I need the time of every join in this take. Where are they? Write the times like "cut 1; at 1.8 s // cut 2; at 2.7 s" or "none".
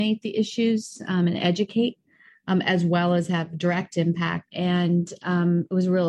cut 1; at 4.5 s